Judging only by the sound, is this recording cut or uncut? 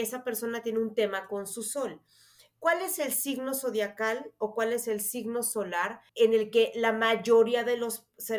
cut